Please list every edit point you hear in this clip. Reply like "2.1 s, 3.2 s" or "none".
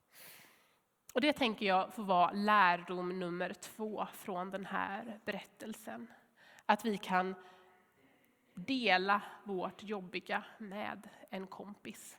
none

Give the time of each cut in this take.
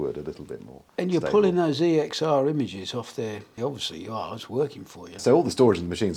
3.6 s, 5.2 s

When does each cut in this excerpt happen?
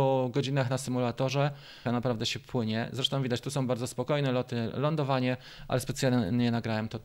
1.9 s

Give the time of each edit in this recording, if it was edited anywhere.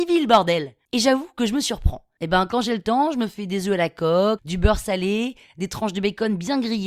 2.2 s, 4.4 s

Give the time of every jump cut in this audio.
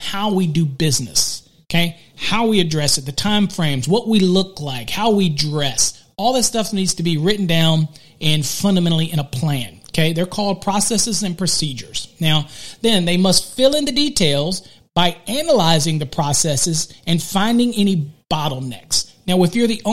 none

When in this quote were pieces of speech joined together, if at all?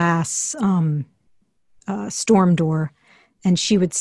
none

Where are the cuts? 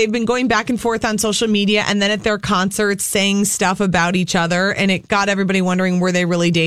none

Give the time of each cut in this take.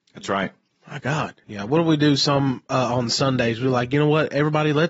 1.4 s

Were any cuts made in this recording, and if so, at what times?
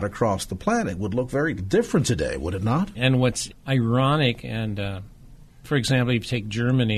2.9 s, 5.6 s

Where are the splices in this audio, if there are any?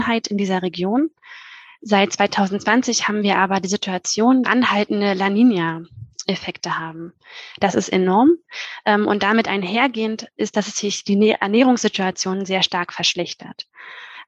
4.4 s, 7.6 s

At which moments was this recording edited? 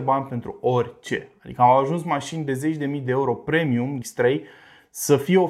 4.0 s

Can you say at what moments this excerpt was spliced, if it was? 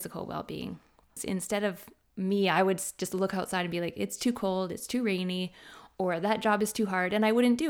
1.2 s

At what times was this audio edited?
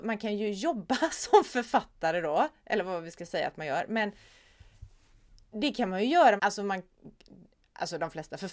6.4 s

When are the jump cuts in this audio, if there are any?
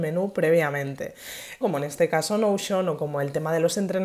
1.6 s

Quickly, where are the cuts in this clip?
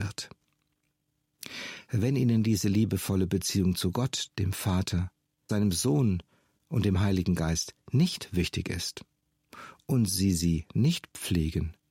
5.5 s

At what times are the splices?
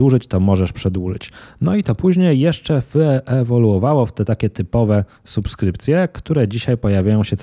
none

